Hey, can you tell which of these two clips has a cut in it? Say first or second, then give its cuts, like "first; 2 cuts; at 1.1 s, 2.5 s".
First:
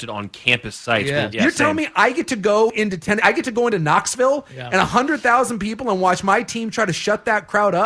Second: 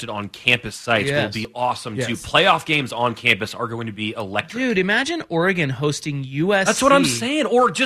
first; 1 cut; at 1.3 s